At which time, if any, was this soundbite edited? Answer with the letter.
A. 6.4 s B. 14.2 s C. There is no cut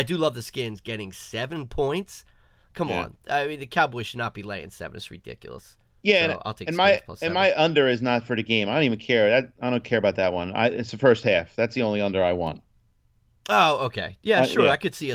C